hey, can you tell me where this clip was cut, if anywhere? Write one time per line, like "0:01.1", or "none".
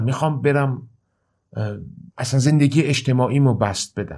0:02.1